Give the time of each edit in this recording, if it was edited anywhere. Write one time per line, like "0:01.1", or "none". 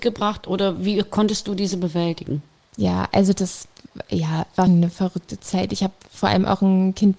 0:04.7